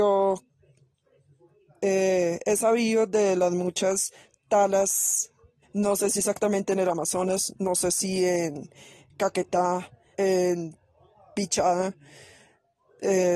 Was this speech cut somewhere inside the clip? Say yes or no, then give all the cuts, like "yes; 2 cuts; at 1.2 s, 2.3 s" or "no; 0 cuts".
yes; 2 cuts; at 5.6 s, 10.1 s